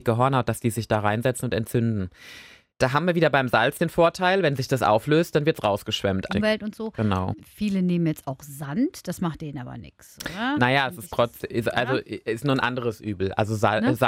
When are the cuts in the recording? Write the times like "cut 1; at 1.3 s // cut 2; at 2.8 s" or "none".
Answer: cut 1; at 6.3 s